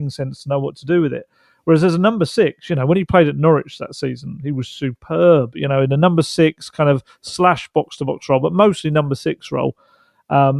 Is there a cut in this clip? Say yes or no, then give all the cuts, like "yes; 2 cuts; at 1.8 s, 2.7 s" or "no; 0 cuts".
no; 0 cuts